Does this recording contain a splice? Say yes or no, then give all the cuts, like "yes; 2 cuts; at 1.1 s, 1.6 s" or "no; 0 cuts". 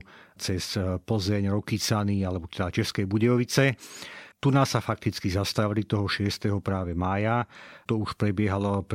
no; 0 cuts